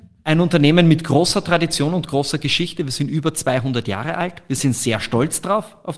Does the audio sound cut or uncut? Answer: uncut